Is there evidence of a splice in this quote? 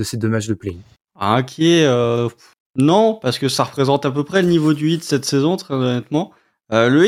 no; 0 cuts

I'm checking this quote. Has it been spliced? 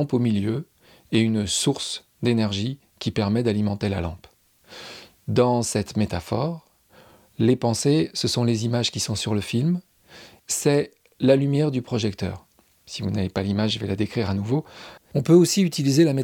yes; 3 cuts; at 10.4 s, 12.8 s, 15.0 s

